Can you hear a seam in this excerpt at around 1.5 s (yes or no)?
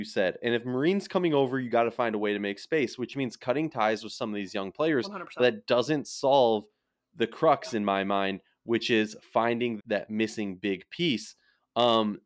no